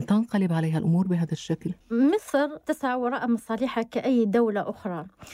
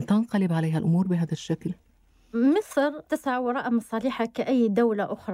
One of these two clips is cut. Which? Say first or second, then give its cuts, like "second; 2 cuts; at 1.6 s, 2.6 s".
first; 1 cut; at 1.8 s